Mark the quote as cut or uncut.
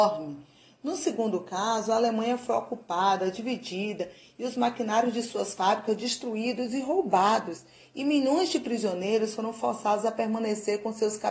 uncut